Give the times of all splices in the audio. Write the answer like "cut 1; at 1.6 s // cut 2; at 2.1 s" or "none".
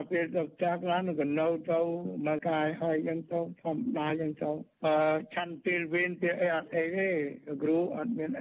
cut 1; at 2.4 s

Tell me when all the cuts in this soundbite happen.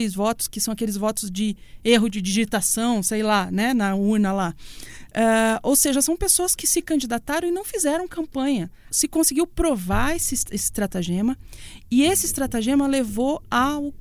cut 1; at 8.9 s

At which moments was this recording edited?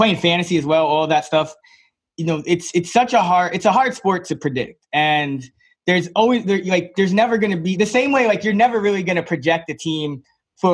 none

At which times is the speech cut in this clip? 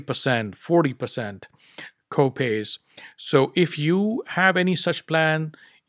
none

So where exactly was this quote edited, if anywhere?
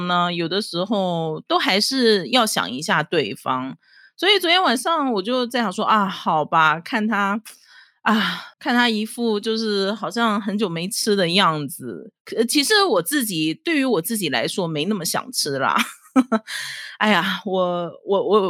cut 1; at 8.5 s

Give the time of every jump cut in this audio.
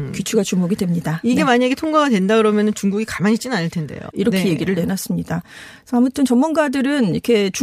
cut 1; at 4.1 s

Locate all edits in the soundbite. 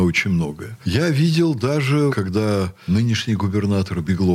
cut 1; at 2.1 s

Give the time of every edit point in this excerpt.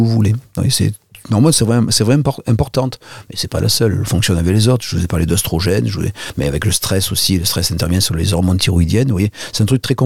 none

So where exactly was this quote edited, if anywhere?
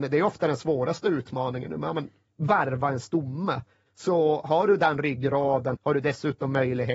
cut 1; at 3.9 s // cut 2; at 5.7 s

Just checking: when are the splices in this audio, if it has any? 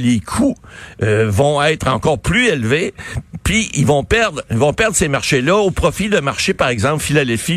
none

